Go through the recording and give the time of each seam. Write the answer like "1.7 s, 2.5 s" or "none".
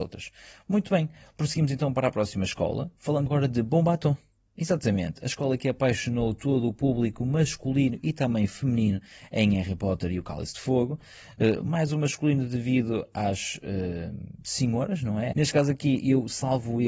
3.3 s, 15.3 s

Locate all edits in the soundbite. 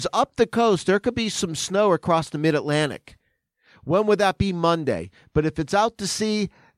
none

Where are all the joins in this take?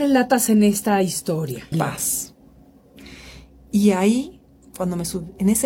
1.7 s

